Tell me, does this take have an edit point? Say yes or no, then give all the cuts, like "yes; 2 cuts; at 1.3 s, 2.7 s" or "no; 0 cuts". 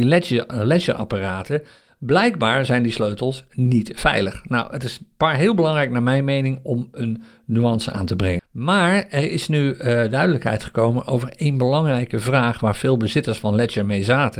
yes; 1 cut; at 8.4 s